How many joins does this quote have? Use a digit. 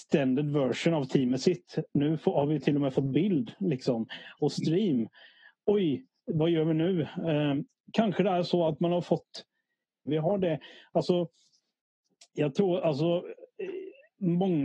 1